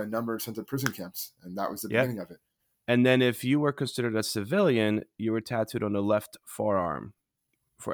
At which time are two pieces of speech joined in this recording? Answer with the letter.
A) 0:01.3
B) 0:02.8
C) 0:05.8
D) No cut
B